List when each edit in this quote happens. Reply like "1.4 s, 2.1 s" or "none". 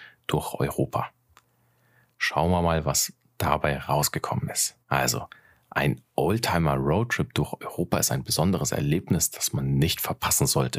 4.8 s